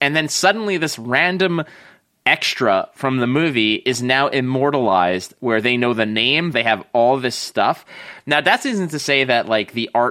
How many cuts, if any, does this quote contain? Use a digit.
1